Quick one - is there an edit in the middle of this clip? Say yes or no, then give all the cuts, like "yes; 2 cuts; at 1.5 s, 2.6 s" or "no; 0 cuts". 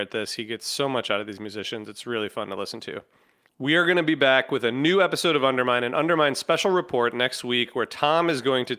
no; 0 cuts